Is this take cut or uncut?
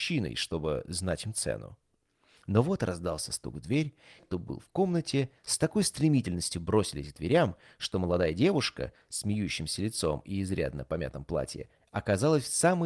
cut